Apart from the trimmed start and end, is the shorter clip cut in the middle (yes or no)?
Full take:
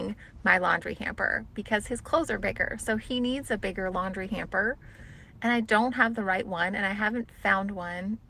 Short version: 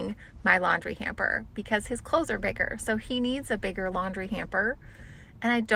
no